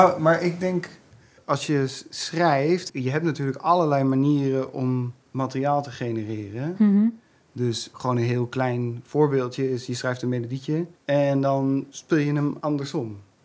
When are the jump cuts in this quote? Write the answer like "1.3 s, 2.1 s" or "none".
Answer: 2.9 s, 11.0 s